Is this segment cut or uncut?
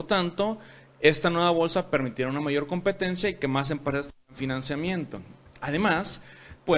uncut